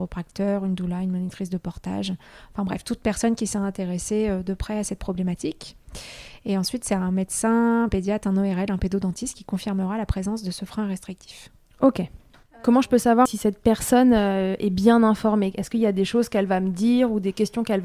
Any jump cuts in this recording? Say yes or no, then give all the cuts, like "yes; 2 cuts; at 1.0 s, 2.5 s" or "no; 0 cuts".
no; 0 cuts